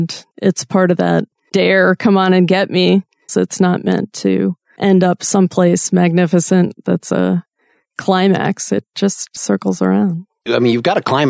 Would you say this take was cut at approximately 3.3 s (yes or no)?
yes